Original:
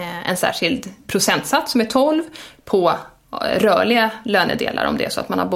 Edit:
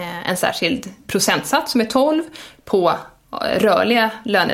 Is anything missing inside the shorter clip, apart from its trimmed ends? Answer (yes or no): no